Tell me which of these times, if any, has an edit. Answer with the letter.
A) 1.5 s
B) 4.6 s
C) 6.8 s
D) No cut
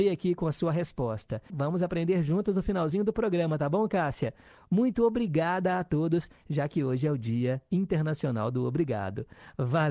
A